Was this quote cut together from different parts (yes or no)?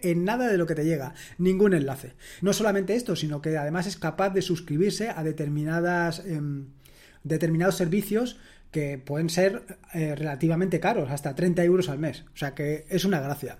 yes